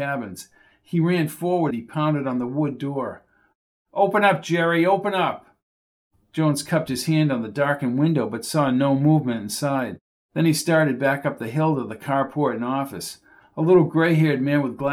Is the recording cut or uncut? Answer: cut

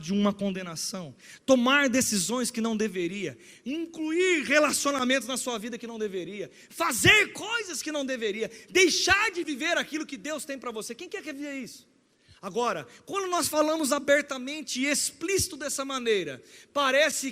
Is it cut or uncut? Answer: uncut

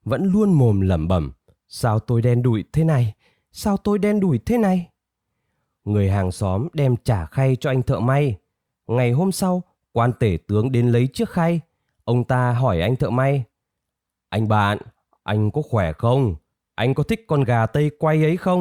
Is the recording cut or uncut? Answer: uncut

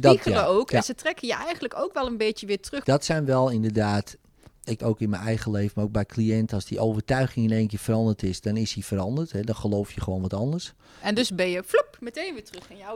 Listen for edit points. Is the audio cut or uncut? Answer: cut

